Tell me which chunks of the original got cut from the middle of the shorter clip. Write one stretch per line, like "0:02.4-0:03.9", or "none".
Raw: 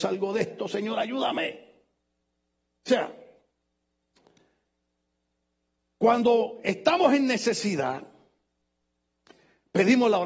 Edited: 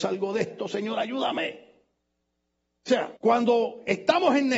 0:03.2-0:05.9